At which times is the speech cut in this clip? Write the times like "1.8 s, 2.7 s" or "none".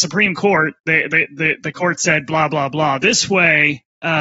none